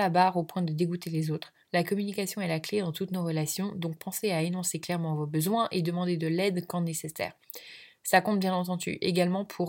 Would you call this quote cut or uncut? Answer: cut